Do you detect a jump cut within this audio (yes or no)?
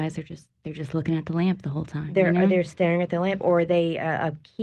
no